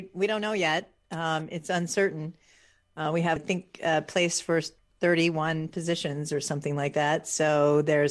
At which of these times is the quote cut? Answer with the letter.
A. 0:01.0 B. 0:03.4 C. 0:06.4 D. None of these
B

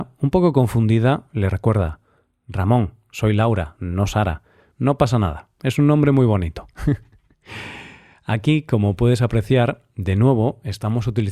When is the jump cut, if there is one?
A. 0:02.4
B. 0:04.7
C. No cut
B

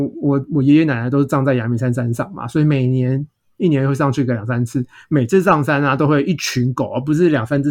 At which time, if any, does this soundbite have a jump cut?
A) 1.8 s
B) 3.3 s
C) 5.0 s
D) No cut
D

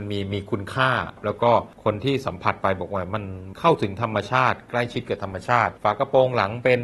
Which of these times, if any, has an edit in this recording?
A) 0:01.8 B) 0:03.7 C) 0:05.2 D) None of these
D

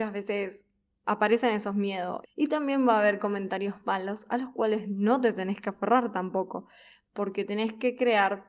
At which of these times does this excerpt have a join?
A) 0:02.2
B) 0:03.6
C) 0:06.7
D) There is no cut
A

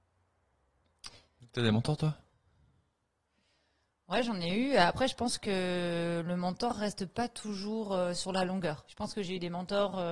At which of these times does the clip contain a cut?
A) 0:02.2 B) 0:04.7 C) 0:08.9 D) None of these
C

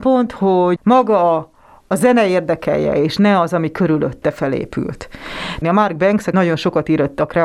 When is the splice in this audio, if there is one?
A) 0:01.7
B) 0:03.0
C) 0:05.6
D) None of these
C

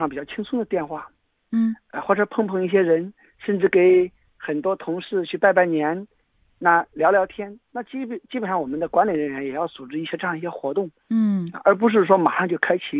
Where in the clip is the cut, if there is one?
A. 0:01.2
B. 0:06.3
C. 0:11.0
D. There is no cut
D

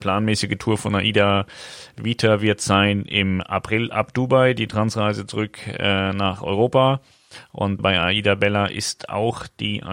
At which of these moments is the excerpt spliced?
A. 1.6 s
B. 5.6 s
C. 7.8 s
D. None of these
C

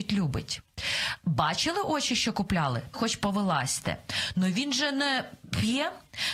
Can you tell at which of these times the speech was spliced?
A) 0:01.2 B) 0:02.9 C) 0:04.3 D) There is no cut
B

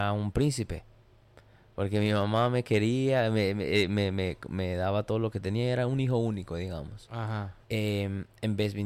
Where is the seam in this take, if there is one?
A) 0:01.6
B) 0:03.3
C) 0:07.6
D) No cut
C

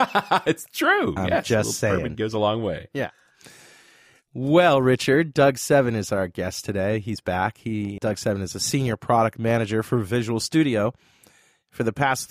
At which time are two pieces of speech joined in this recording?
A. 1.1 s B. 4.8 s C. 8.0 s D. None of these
C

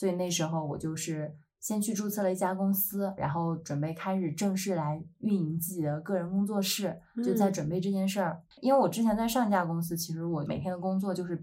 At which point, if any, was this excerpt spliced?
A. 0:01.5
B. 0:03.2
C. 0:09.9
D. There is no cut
B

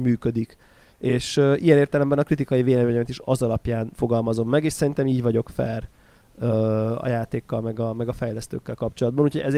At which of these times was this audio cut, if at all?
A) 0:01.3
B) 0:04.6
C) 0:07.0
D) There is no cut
D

